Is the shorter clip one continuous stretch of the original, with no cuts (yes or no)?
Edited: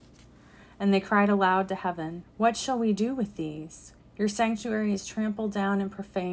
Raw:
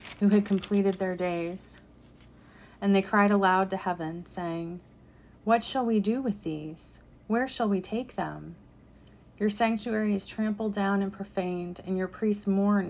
no